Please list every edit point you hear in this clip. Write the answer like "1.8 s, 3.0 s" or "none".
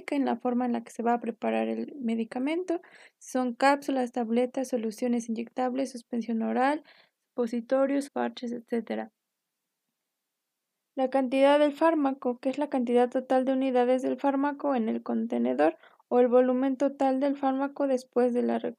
8.1 s